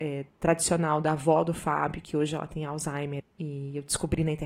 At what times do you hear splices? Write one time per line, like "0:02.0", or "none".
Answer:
0:03.2